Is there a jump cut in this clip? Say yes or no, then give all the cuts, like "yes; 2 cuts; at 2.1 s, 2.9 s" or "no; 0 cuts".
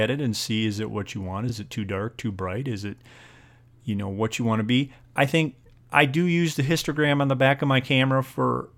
no; 0 cuts